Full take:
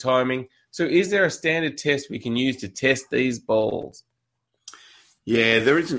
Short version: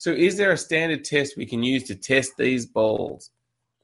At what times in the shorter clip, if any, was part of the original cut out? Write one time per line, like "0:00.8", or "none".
none